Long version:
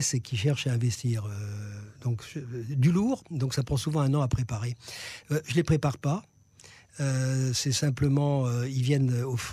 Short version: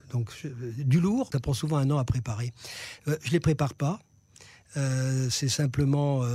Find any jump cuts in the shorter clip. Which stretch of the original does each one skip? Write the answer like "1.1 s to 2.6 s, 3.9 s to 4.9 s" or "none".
3.2 s to 3.6 s